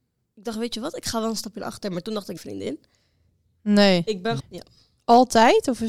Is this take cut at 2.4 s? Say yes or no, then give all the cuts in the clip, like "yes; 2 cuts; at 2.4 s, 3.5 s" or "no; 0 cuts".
yes; 2 cuts; at 2.4 s, 4.4 s